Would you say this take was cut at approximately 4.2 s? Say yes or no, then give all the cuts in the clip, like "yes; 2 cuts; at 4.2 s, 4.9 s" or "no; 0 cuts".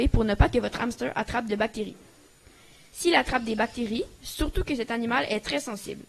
yes; 1 cut; at 4.2 s